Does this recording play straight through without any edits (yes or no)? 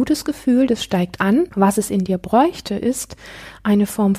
no